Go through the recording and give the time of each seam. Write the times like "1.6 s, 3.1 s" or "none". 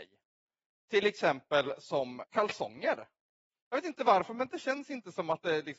2.2 s